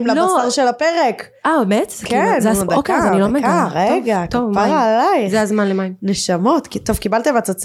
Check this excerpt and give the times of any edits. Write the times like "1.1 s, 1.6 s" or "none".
none